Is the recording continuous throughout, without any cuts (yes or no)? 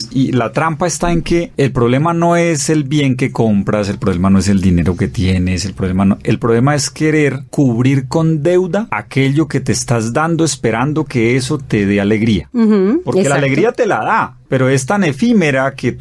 yes